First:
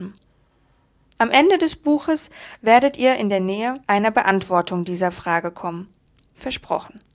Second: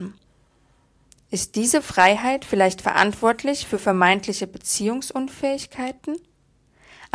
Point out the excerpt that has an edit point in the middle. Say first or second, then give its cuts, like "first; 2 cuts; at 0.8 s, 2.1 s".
first; 2 cuts; at 1.2 s, 3.8 s